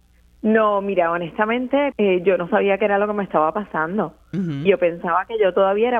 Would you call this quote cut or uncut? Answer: cut